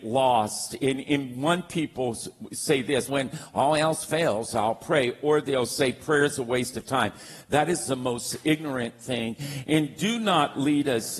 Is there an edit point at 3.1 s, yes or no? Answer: yes